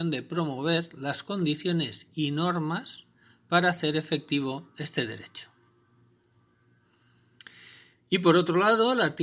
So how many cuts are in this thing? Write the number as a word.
one